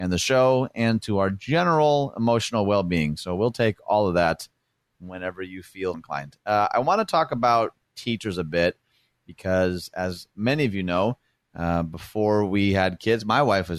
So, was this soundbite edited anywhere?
yes; 1 cut; at 5.9 s

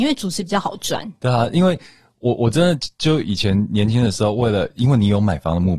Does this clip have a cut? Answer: no; 0 cuts

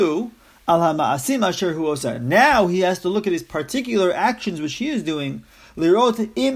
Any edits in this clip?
no; 0 cuts

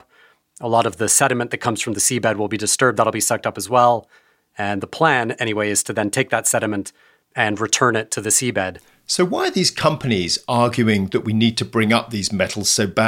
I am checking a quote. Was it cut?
no; 0 cuts

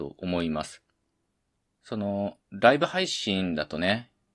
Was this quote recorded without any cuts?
yes; 0 cuts

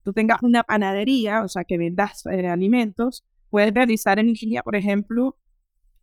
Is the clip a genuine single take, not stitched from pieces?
yes; 0 cuts

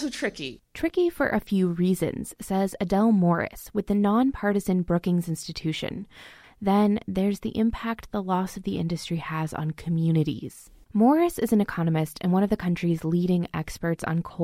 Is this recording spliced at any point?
yes; 2 cuts; at 6.4 s, 10.8 s

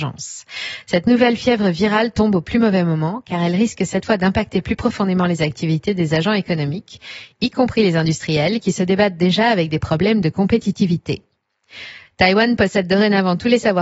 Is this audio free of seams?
no; 1 cut; at 12.1 s

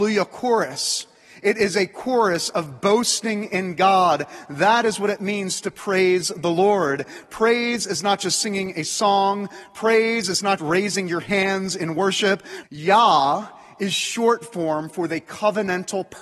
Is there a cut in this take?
yes; 2 cuts; at 10.6 s, 12.6 s

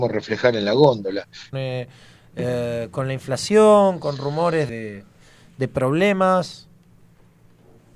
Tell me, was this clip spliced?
yes; 2 cuts; at 1.5 s, 4.7 s

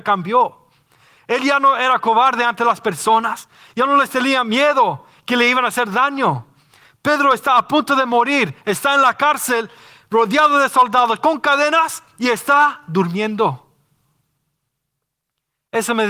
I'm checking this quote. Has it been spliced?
no; 0 cuts

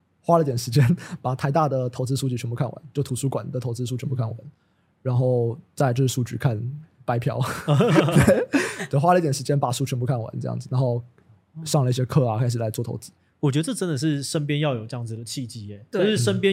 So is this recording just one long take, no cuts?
yes; 0 cuts

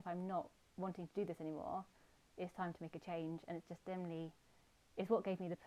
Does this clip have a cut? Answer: no; 0 cuts

